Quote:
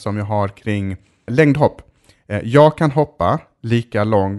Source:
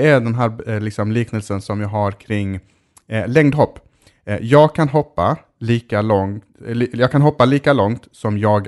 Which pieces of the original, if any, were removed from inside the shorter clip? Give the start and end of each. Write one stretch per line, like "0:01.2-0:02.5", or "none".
0:02.9-0:03.3